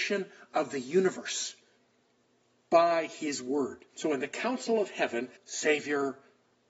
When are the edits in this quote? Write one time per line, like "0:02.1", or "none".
0:03.9
0:05.4

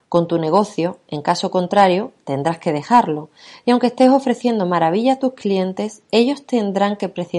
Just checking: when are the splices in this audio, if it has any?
none

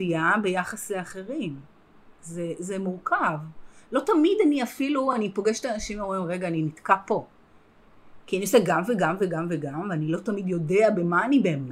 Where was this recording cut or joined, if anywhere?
none

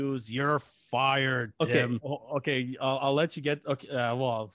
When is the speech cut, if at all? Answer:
0:02.0

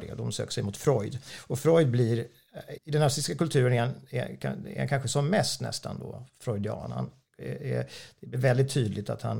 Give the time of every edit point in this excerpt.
0:02.8

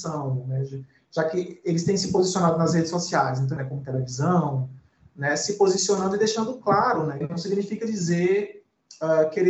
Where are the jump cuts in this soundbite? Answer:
0:03.6
0:07.2

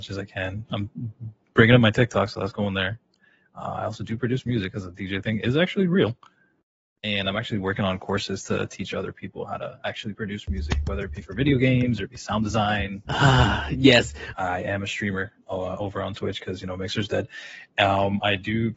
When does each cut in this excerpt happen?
0:13.1
0:14.3

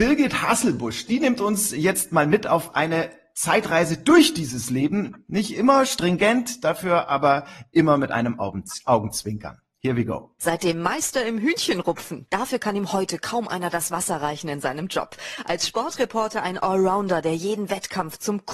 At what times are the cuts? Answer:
0:10.4
0:12.3

